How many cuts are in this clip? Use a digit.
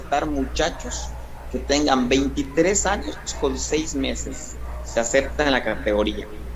0